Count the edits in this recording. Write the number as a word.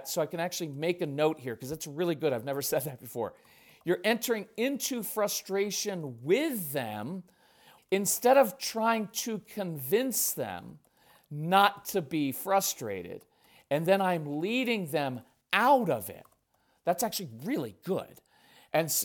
one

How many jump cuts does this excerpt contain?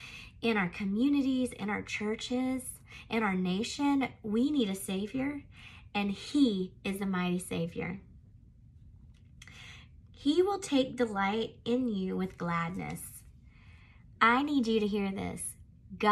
one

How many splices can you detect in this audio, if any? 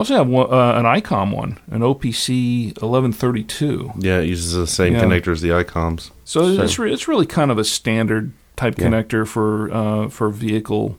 zero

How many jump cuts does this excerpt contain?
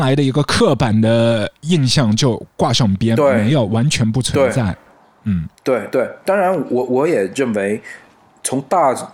zero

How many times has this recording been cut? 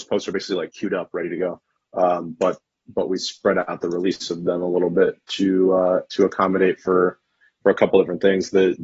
zero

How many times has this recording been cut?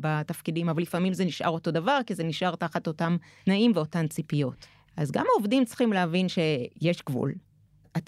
one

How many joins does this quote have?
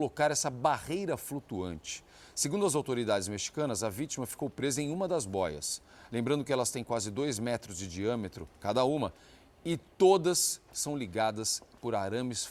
zero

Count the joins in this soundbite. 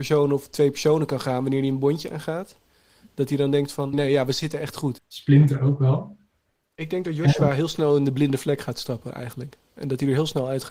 two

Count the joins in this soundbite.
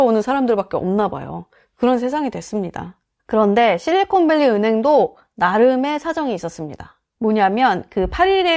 one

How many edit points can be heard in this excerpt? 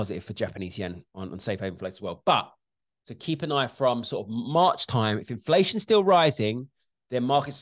zero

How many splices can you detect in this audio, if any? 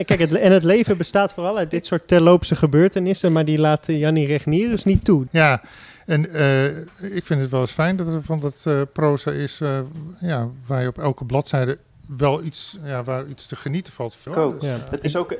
two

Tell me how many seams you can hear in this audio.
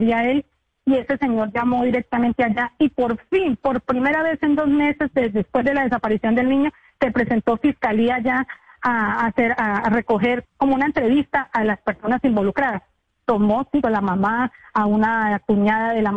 two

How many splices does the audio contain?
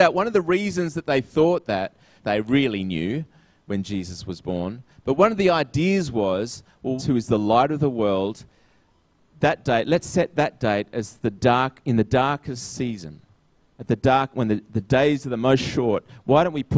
two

